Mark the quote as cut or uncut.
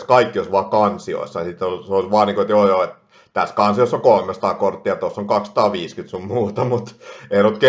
uncut